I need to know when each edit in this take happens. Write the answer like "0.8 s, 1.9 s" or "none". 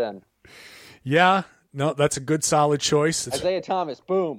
3.3 s

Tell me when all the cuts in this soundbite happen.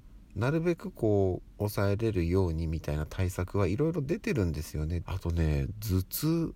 5.0 s

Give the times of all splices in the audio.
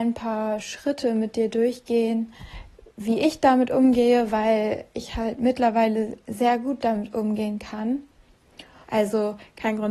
8.8 s

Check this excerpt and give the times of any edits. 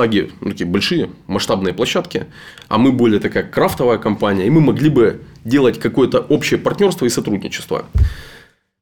none

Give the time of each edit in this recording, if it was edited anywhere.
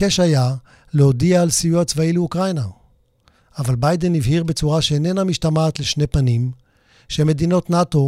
none

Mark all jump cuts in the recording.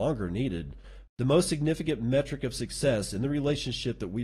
1.1 s

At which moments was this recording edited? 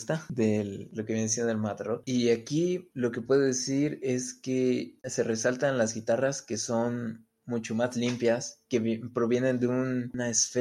2.0 s

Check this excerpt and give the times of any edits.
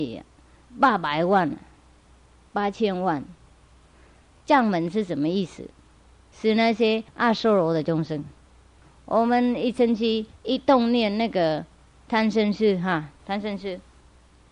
none

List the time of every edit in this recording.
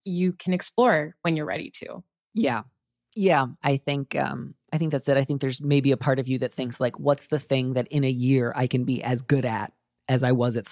none

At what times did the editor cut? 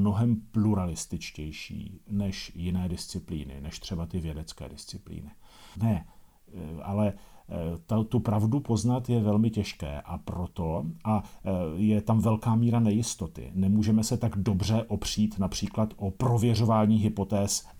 5.7 s

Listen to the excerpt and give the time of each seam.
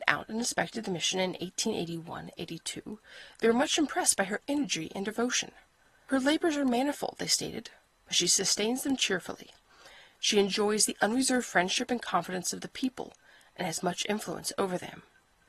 none

